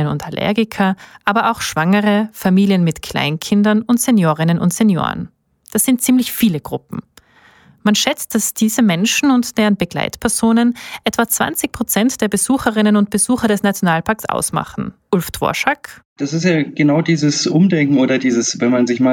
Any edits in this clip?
no; 0 cuts

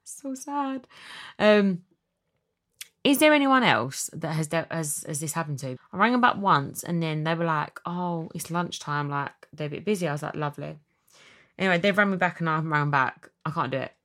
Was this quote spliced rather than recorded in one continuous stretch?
yes; 1 cut; at 5.8 s

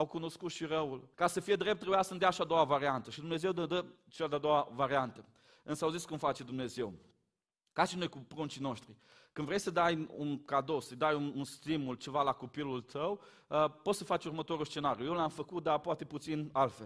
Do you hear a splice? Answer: yes; 1 cut; at 1.1 s

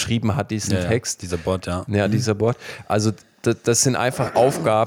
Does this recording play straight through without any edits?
yes; 0 cuts

